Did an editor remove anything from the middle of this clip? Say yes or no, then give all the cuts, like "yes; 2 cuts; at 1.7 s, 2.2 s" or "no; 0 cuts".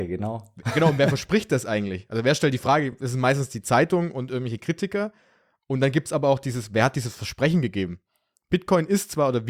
no; 0 cuts